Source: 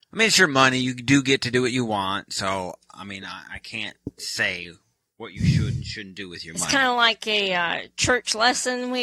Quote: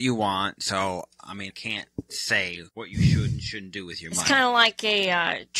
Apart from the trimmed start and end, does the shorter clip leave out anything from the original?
yes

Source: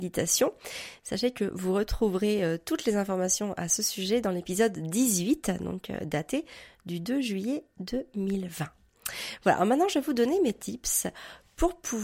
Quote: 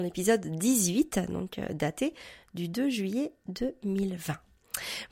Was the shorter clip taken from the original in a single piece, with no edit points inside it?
yes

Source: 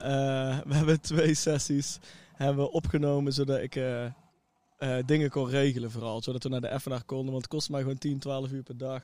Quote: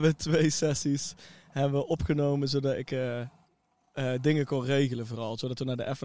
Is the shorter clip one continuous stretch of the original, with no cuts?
yes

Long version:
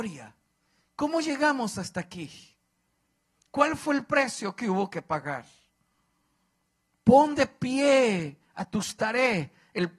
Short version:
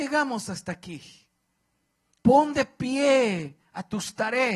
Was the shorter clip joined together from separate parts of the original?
yes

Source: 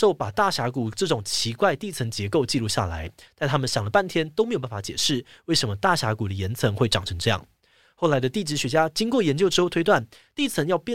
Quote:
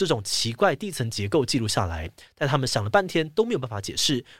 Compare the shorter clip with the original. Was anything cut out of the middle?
no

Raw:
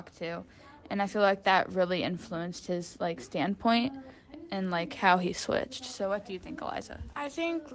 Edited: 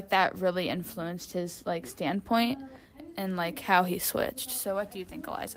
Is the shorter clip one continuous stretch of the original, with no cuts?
yes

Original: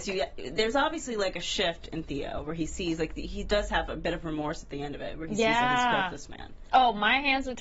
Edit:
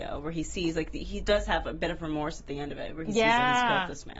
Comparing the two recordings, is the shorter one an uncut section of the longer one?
yes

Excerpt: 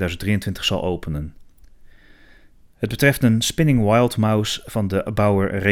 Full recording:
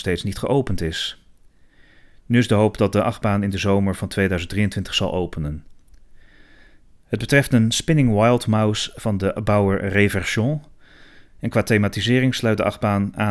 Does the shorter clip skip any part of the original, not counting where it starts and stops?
no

